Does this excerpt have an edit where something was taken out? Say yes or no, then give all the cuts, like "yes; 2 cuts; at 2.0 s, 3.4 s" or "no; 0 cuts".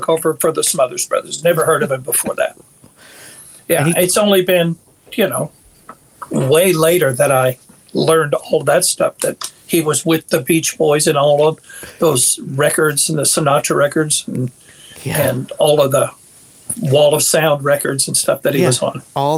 no; 0 cuts